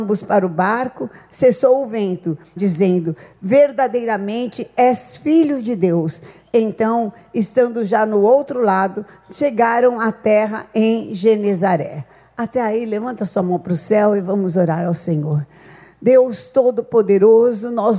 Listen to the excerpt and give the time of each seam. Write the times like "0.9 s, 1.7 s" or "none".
2.6 s